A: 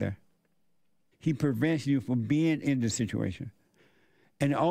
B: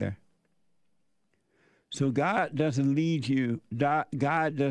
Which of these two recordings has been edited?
A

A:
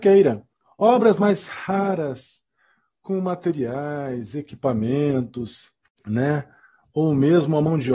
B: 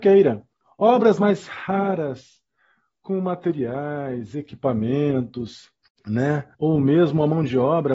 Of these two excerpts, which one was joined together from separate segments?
B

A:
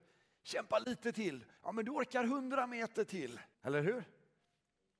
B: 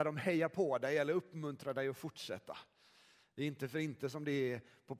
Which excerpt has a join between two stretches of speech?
A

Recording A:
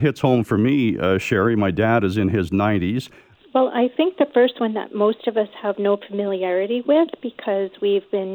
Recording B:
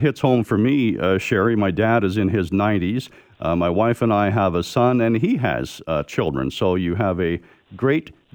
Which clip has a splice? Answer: A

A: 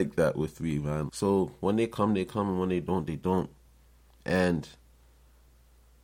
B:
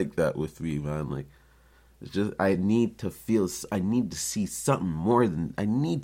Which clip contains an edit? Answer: A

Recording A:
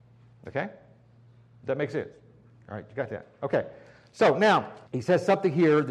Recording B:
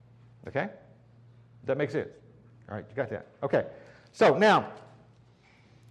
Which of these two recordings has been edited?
A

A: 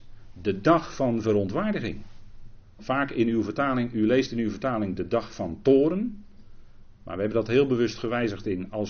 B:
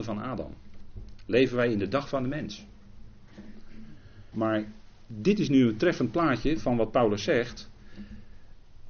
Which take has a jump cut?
B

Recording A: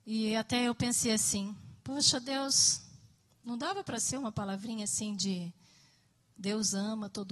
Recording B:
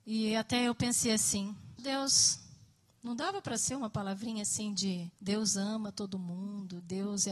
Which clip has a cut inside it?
B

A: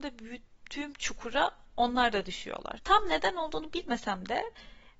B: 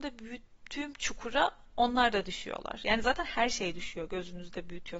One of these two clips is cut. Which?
A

